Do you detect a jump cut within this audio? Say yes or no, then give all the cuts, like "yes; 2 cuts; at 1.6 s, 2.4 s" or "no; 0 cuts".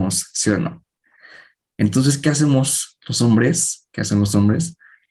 no; 0 cuts